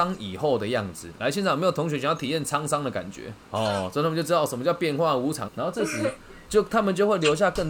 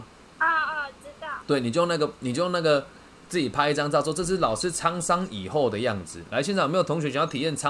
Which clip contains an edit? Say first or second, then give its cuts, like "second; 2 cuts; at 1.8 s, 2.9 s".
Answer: first; 2 cuts; at 3.4 s, 5.4 s